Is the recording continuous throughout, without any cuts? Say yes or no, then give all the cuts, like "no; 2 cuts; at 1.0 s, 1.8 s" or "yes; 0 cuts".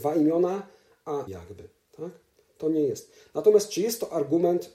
no; 1 cut; at 1.3 s